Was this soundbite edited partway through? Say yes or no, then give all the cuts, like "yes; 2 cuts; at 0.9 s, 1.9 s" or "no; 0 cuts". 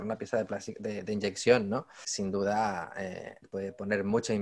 yes; 1 cut; at 3.4 s